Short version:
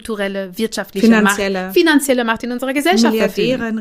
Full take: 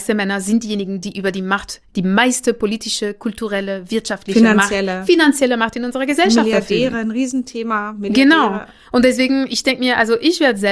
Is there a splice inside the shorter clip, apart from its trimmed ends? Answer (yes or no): no